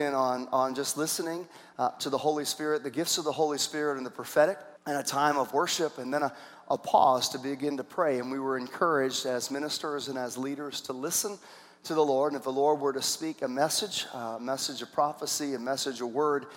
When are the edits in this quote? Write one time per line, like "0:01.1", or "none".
0:04.8